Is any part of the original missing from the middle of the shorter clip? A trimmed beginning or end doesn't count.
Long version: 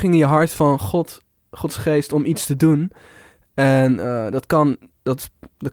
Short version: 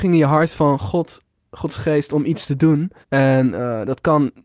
yes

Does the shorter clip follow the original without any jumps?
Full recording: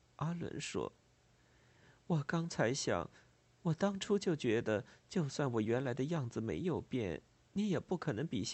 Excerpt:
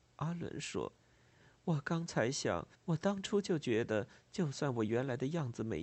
no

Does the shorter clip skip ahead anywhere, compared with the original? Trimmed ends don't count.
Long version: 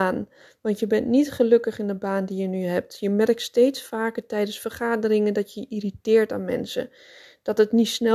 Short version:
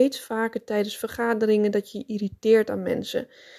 no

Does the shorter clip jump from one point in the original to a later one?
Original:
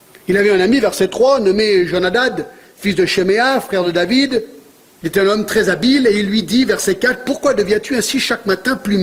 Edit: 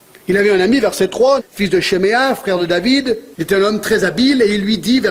yes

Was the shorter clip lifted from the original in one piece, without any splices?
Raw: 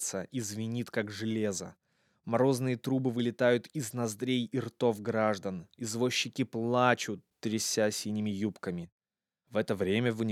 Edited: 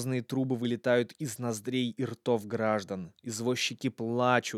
yes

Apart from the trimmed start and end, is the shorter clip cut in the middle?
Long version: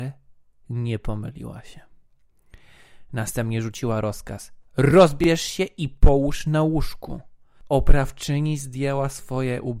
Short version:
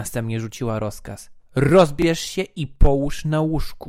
no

